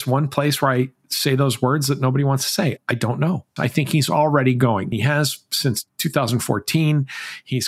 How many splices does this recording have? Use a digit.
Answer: 2